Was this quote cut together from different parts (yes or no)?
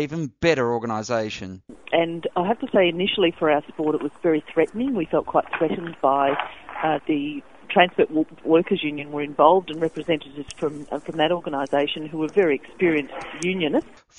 yes